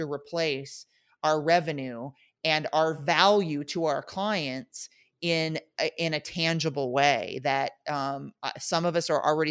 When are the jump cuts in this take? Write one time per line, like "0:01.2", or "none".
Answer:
none